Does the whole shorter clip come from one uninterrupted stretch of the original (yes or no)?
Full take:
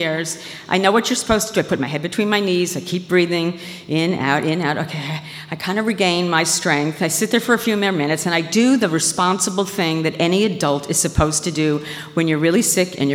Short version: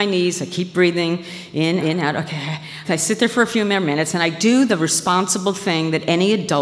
no